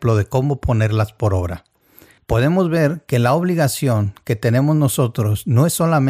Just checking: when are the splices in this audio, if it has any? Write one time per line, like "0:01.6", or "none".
0:02.2